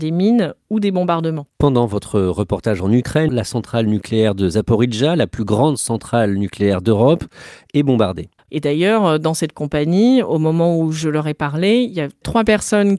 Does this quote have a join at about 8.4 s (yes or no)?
yes